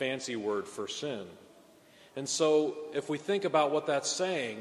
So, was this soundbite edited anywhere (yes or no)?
no